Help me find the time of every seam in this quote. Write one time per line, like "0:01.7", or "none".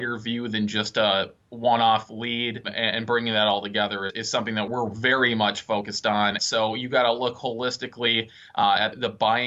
0:06.4